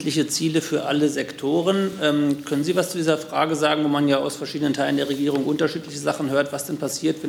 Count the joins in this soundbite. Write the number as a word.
zero